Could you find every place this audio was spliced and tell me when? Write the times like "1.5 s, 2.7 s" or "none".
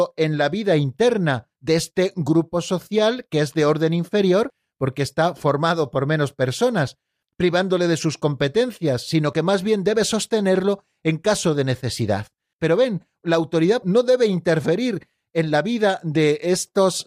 12.5 s, 13.8 s